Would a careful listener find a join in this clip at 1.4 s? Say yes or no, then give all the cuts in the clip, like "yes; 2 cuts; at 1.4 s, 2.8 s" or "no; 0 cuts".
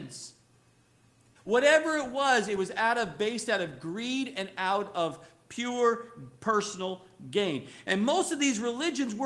yes; 1 cut; at 1.4 s